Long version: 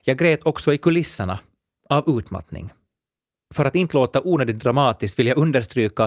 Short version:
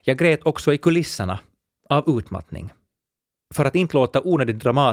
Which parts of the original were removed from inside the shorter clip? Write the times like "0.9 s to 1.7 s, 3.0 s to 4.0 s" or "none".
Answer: none